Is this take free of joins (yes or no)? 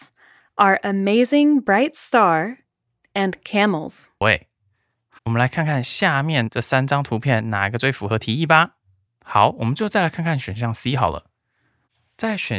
no